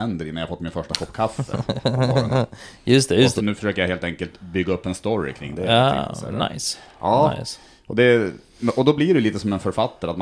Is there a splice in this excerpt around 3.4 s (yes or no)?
yes